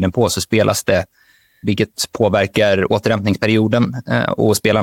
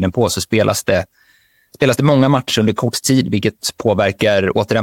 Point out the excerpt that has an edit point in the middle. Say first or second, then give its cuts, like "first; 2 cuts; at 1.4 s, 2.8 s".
first; 1 cut; at 1.6 s